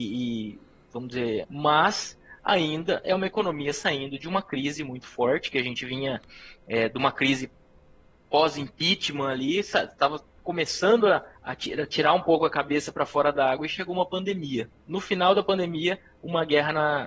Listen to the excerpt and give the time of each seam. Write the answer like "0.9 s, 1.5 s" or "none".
1.4 s, 11.3 s